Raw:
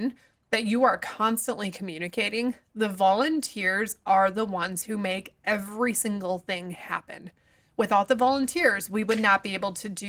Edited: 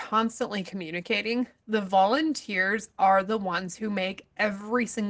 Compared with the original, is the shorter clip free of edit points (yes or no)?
yes